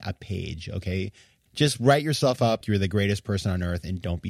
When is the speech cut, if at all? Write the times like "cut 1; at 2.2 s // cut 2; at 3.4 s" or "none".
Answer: cut 1; at 1.5 s // cut 2; at 2.6 s